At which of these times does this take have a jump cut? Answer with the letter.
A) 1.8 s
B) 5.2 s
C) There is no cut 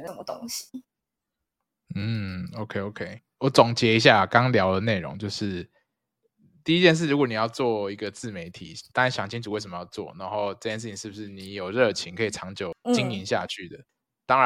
C